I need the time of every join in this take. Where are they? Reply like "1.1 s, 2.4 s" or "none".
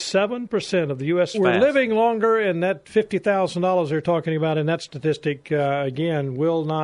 1.3 s